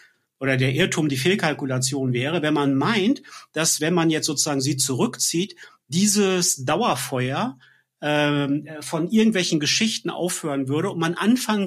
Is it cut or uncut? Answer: uncut